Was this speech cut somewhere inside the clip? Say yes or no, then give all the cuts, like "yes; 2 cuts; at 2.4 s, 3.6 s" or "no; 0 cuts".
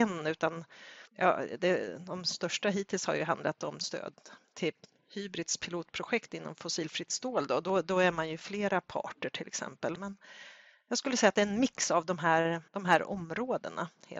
yes; 3 cuts; at 1.1 s, 10.0 s, 12.7 s